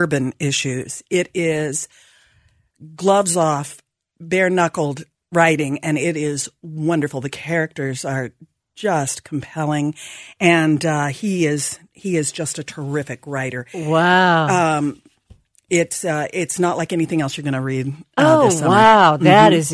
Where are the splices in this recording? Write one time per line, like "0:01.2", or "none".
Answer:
none